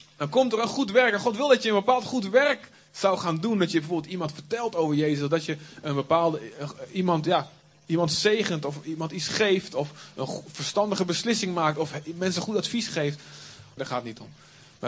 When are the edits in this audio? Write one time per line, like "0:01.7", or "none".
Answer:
0:13.8